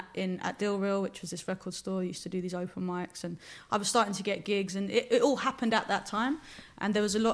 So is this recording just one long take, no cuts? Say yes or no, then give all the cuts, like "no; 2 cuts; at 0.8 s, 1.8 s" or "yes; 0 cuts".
yes; 0 cuts